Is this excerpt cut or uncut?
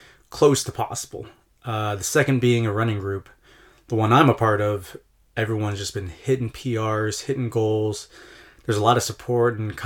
uncut